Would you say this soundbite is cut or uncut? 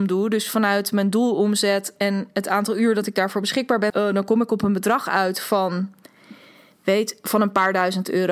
cut